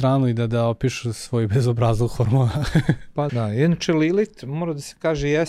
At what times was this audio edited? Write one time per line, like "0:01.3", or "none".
0:03.3